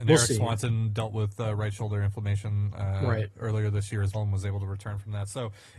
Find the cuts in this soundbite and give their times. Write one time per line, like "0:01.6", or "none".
0:04.1